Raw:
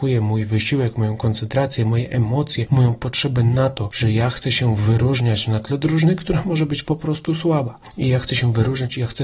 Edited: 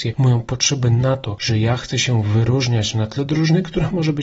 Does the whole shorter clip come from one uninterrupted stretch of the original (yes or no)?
yes